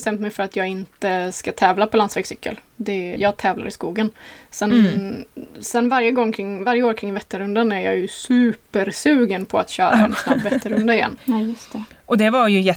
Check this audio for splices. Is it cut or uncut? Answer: cut